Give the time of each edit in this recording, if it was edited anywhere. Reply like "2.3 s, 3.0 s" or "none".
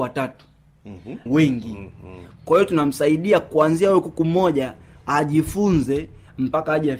1.3 s